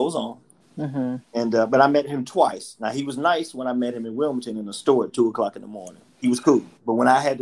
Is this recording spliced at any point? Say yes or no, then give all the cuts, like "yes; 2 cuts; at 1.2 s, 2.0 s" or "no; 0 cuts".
yes; 1 cut; at 6.1 s